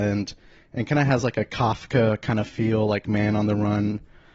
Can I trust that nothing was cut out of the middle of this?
yes; 0 cuts

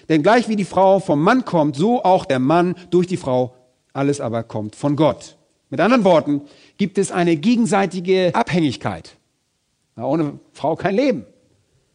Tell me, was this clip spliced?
yes; 1 cut; at 9.8 s

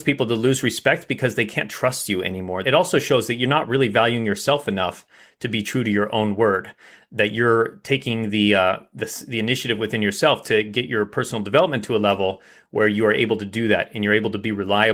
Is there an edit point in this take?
yes; 1 cut; at 2.6 s

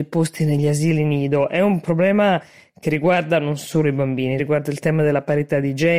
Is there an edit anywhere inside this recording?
yes; 1 cut; at 4.4 s

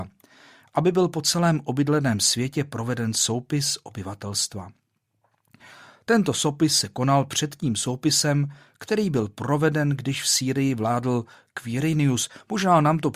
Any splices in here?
no; 0 cuts

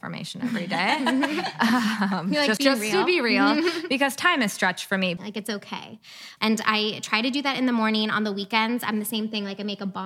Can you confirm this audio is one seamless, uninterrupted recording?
no; 3 cuts; at 2.6 s, 5.2 s, 6.4 s

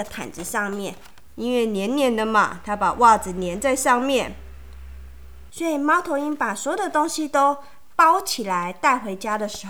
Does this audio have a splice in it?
yes; 2 cuts; at 1.3 s, 5.5 s

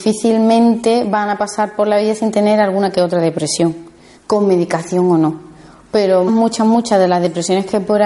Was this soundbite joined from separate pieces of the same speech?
yes; 2 cuts; at 4.2 s, 6.3 s

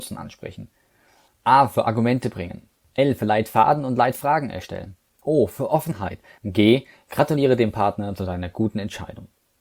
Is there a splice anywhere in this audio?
yes; 1 cut; at 6.4 s

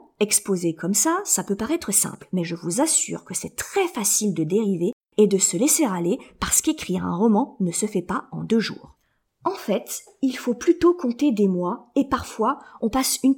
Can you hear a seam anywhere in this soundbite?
no; 0 cuts

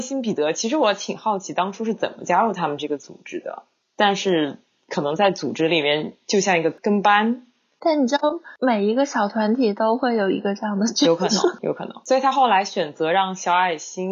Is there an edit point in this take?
no; 0 cuts

